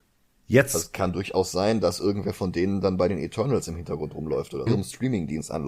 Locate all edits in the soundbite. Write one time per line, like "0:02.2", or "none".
0:04.7